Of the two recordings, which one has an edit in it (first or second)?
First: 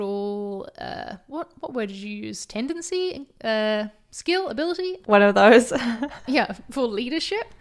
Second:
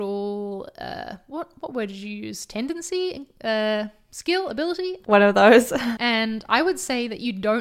second